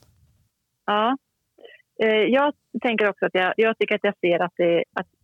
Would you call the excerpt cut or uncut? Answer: cut